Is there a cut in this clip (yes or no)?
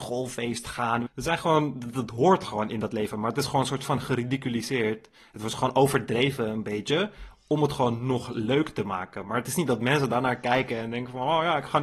yes